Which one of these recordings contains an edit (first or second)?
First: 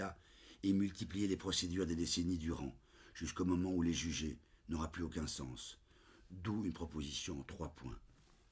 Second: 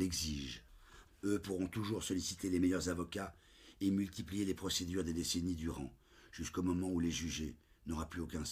second